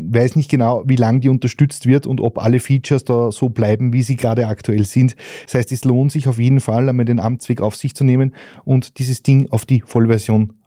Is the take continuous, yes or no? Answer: yes